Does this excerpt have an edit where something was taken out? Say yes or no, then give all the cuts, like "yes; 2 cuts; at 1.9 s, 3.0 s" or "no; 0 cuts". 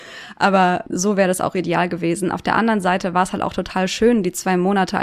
no; 0 cuts